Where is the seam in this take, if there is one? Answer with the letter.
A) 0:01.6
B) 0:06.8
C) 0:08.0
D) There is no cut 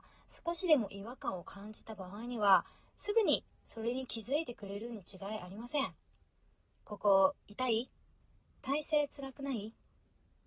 D